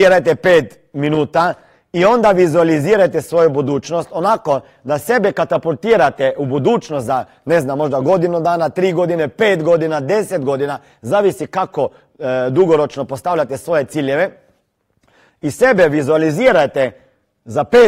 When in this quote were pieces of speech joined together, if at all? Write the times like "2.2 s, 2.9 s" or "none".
none